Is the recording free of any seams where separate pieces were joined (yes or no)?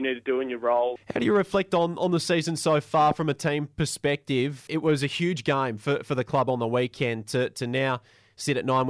no